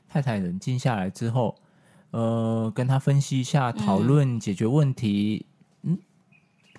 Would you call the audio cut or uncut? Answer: uncut